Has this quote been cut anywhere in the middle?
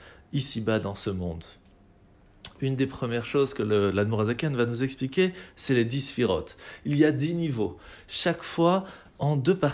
no; 0 cuts

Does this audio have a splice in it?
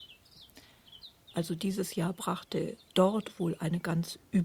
yes; 2 cuts; at 1.2 s, 2.9 s

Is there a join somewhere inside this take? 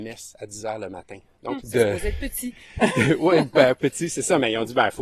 yes; 1 cut; at 1.6 s

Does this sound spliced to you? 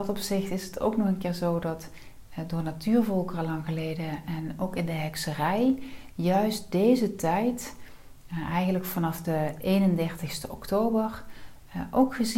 no; 0 cuts

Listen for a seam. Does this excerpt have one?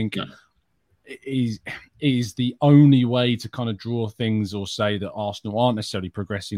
no; 0 cuts

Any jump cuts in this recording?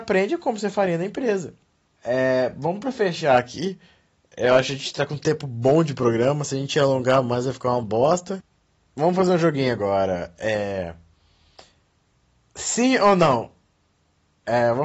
yes; 2 cuts; at 2.0 s, 8.8 s

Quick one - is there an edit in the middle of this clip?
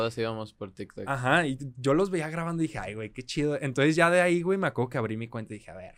no; 0 cuts

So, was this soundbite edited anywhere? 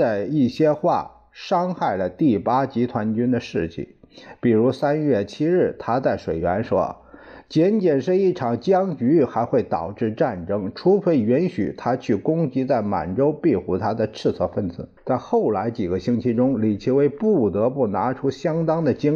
yes; 1 cut; at 15.0 s

